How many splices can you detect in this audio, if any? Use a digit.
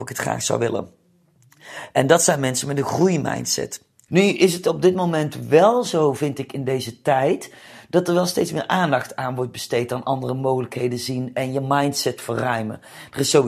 1